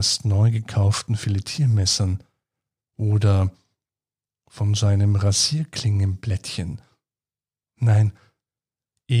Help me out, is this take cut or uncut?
uncut